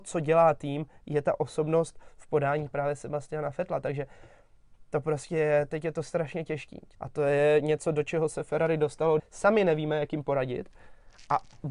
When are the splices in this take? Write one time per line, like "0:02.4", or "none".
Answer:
0:06.9
0:09.2